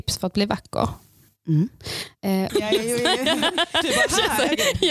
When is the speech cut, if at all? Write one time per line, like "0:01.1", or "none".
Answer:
0:02.5